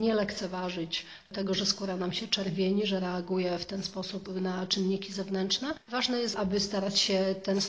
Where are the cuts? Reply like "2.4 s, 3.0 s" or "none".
6.3 s